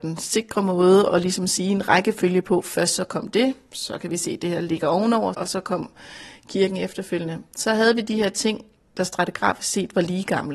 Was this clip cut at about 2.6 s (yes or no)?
no